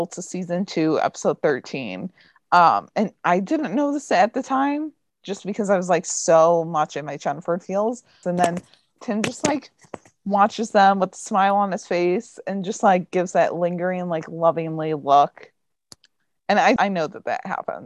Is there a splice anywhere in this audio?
yes; 2 cuts; at 8.2 s, 16.8 s

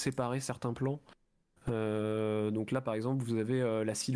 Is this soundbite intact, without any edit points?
yes; 0 cuts

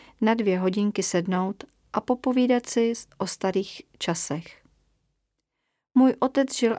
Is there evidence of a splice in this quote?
no; 0 cuts

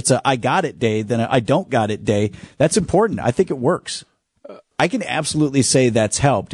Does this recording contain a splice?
yes; 1 cut; at 4.7 s

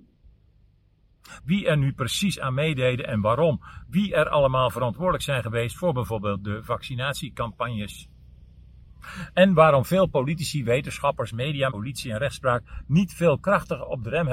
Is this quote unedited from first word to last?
no; 2 cuts; at 1.4 s, 11.7 s

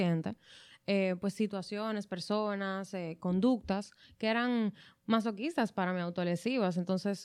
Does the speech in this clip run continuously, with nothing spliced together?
yes; 0 cuts

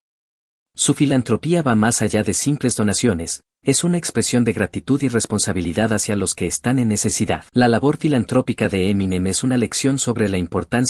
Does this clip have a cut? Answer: yes; 1 cut; at 7.5 s

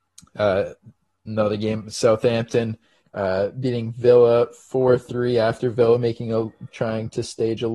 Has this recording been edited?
no; 0 cuts

